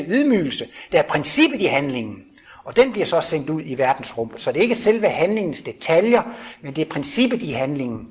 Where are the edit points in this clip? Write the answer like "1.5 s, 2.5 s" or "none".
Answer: none